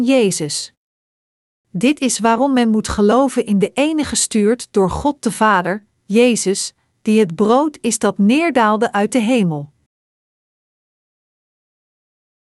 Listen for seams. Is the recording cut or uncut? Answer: uncut